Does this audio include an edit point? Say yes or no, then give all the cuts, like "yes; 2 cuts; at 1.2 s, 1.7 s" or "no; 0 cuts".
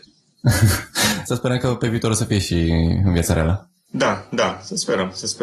no; 0 cuts